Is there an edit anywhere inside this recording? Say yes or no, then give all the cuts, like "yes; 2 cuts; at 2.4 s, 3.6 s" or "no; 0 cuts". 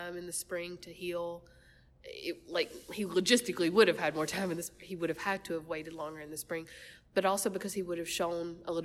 no; 0 cuts